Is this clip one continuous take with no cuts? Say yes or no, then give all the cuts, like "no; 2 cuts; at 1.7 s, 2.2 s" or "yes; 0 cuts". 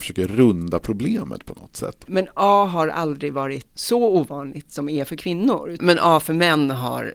no; 1 cut; at 2.0 s